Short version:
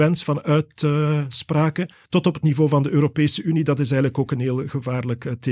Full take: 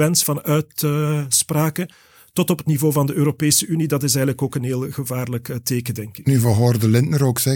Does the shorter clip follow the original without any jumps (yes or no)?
no